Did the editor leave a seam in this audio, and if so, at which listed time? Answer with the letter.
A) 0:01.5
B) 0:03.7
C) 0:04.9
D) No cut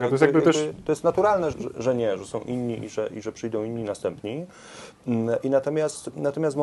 A